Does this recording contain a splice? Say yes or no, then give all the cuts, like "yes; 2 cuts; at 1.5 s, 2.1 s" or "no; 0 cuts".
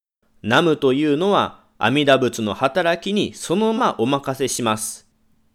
yes; 1 cut; at 3.8 s